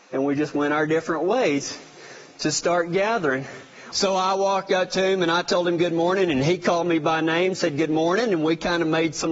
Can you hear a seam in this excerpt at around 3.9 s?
yes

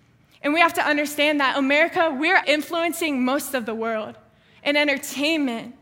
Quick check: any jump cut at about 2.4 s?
yes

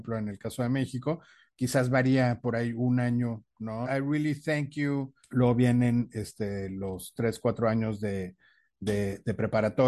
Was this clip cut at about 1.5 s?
no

